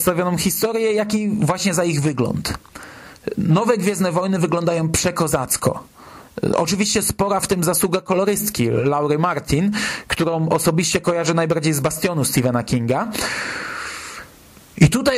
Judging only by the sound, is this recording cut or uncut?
uncut